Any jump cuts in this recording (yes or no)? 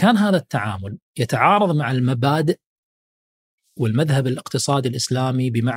no